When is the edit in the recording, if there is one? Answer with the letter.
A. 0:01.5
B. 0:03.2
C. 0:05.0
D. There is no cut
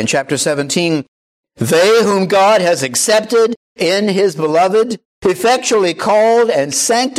C